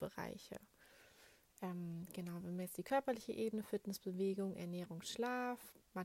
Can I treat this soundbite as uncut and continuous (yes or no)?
yes